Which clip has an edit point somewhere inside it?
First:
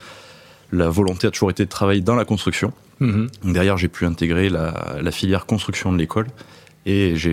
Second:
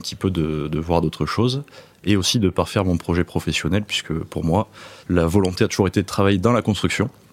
second; 1 cut; at 5.0 s

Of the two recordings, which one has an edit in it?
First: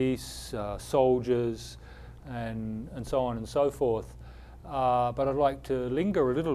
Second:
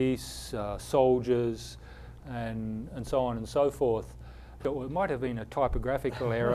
second; 1 cut; at 4.6 s

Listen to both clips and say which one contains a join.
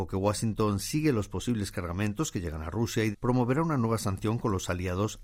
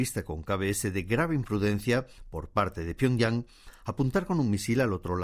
first; 1 cut; at 3.1 s

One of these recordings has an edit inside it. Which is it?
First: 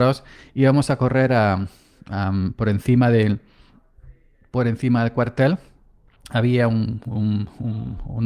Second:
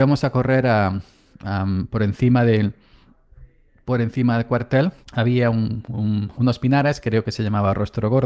second; 2 cuts; at 5.0 s, 6.3 s

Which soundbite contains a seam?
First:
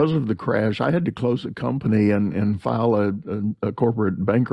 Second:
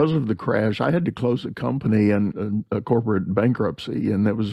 second; 1 cut; at 2.3 s

